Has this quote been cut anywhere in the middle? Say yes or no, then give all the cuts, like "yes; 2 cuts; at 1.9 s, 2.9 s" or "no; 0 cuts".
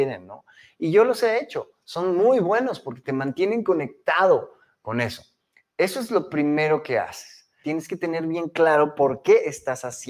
yes; 1 cut; at 7.6 s